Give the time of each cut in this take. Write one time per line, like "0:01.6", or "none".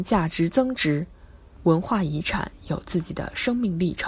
0:01.6